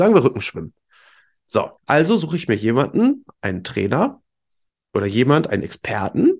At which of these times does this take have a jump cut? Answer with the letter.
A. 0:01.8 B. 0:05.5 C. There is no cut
A